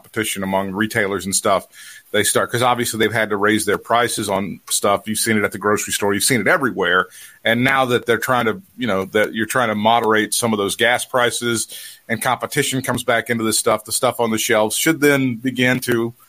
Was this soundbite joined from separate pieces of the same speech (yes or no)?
no